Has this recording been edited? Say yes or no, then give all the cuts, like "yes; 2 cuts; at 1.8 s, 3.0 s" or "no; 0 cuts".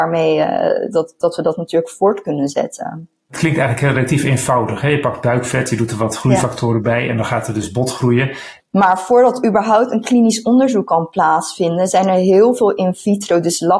yes; 1 cut; at 8.6 s